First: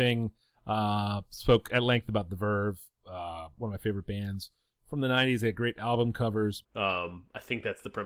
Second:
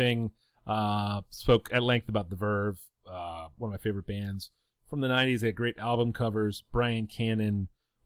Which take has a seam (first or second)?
first